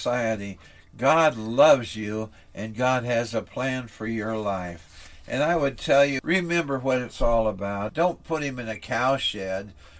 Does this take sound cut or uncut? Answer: cut